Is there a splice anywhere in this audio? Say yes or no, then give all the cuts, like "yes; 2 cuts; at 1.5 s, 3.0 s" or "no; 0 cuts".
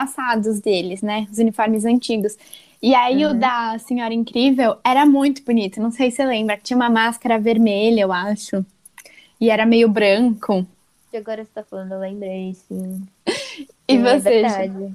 yes; 2 cuts; at 11.1 s, 13.2 s